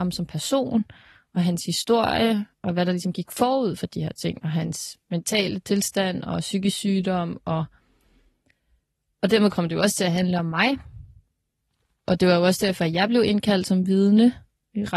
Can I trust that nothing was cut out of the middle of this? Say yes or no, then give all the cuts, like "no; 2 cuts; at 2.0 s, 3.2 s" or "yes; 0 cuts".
yes; 0 cuts